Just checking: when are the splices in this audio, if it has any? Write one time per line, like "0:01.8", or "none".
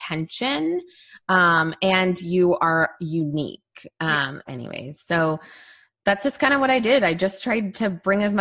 0:04.5